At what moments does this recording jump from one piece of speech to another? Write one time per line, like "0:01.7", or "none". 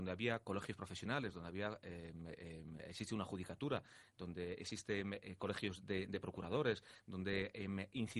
none